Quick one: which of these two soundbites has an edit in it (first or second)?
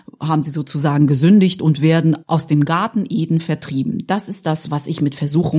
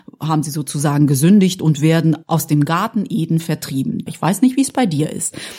second